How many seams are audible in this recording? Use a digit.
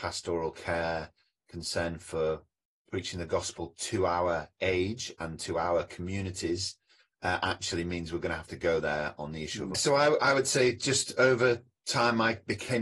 1